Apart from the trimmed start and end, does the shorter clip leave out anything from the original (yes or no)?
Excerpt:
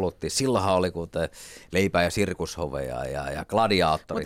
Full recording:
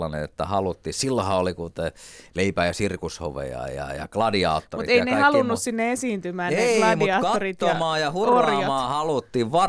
no